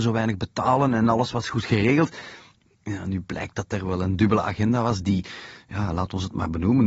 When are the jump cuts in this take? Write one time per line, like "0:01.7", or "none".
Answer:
none